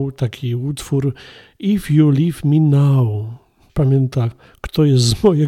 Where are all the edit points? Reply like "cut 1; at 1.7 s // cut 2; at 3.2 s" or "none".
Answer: cut 1; at 3.7 s